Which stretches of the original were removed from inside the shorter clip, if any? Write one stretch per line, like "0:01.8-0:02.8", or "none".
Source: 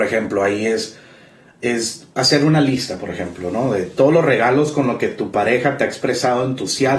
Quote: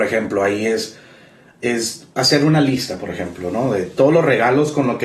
none